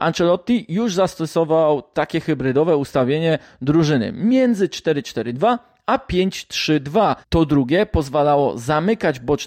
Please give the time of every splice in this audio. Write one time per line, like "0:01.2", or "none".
0:07.2